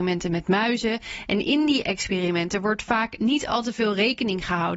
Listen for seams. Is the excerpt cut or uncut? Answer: uncut